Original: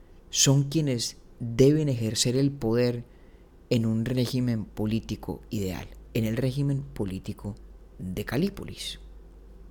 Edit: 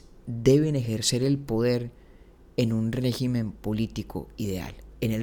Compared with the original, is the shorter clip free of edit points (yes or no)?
yes